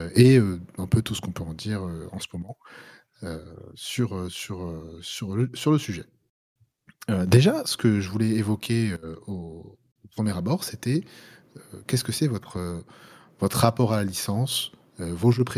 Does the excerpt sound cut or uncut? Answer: uncut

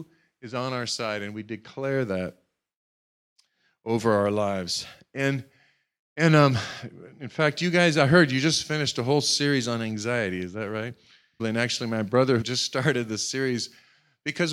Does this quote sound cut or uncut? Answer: cut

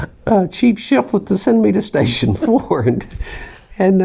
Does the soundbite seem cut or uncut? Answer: uncut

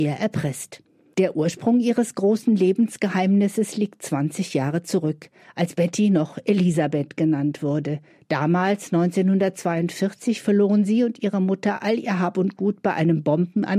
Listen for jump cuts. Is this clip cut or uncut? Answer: uncut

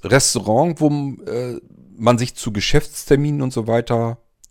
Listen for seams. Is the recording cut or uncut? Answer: uncut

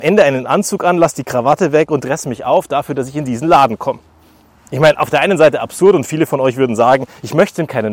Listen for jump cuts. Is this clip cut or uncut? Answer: uncut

